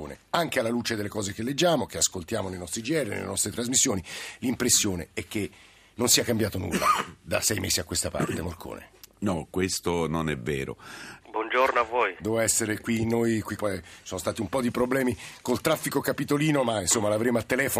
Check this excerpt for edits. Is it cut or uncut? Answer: cut